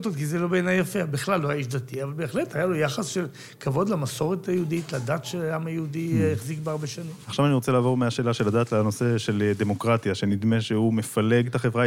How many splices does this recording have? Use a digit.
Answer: 0